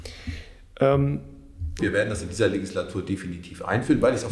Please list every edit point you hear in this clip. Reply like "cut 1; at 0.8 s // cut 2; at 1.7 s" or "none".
cut 1; at 1.8 s